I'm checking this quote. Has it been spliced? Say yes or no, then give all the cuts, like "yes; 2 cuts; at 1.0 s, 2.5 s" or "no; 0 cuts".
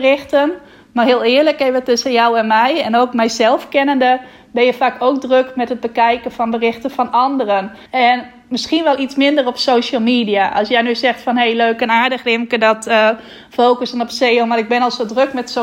yes; 1 cut; at 7.9 s